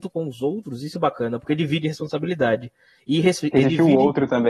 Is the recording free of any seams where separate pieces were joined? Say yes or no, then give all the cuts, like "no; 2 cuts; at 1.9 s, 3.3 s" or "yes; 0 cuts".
no; 1 cut; at 0.9 s